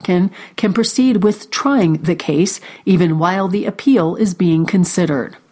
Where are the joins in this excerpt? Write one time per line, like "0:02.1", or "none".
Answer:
none